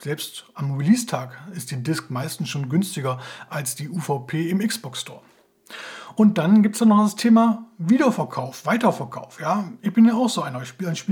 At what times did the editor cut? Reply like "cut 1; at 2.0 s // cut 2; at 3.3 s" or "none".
none